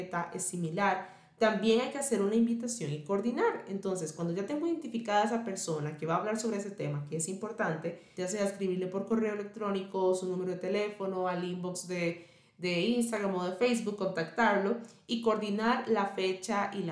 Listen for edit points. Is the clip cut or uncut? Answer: cut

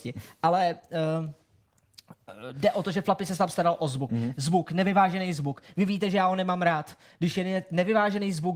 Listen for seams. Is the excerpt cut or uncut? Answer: cut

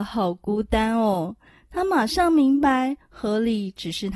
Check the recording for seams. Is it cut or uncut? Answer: uncut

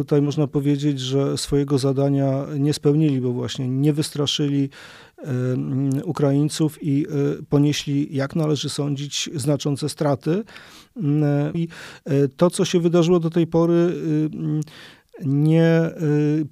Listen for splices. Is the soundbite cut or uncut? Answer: cut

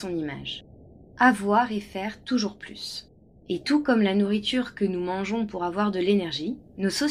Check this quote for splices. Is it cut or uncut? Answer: cut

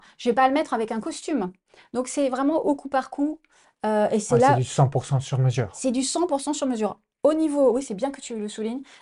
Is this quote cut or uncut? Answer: uncut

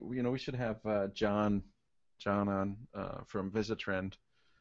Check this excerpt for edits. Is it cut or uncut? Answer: uncut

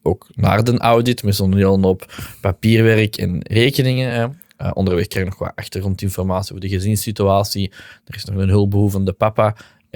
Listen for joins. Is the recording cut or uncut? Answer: uncut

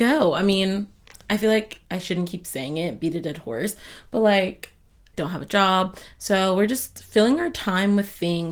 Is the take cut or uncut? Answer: cut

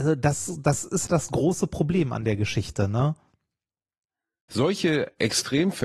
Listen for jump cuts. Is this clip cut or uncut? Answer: cut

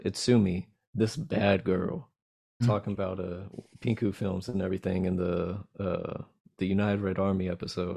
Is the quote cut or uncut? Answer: cut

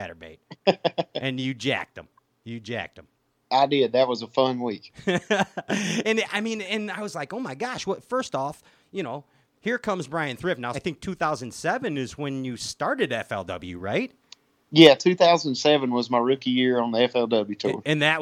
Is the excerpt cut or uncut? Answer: cut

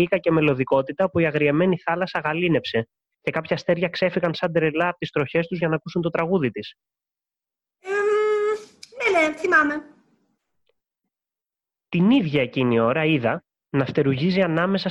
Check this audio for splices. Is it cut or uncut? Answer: cut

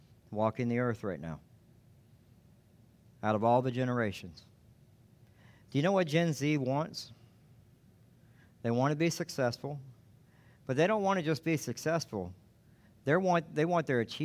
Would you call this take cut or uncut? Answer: uncut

